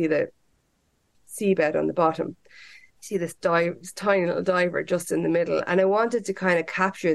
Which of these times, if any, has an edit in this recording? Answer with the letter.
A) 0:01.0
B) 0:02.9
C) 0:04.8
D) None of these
B